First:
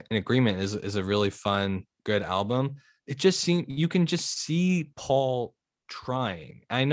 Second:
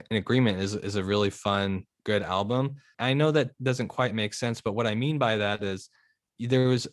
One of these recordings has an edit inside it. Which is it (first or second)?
second